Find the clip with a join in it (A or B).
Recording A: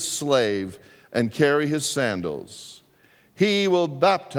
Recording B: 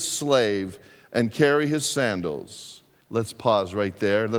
B